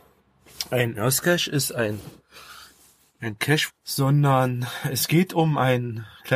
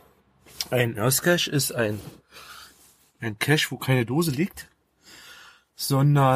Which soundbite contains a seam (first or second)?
first